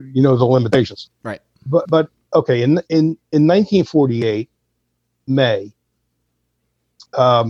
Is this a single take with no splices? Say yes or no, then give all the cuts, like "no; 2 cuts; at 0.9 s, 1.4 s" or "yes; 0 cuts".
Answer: yes; 0 cuts